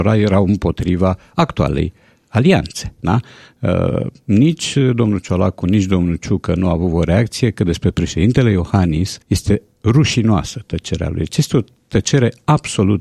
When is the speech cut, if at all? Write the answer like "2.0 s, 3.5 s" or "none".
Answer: 9.2 s

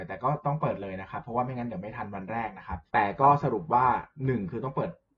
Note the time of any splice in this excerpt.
2.9 s

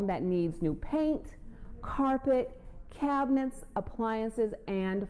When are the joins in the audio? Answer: none

